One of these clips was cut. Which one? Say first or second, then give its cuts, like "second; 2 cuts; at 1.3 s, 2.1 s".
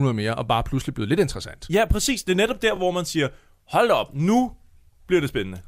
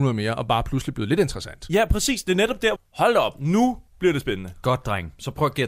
second; 2 cuts; at 2.8 s, 3.9 s